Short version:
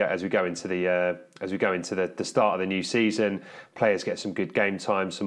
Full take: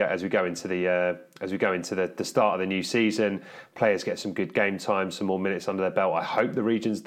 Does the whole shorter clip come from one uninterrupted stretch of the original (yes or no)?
yes